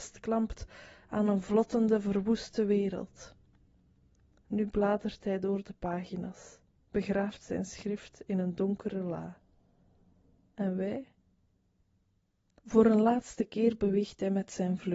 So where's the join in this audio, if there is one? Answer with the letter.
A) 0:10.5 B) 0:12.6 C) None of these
B